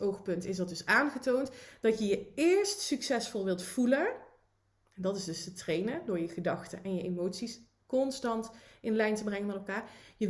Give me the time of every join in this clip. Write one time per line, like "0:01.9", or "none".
none